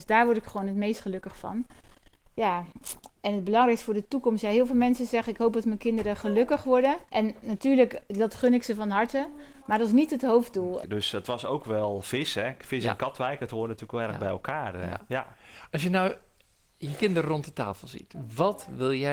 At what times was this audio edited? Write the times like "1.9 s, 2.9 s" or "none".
7.1 s, 10.8 s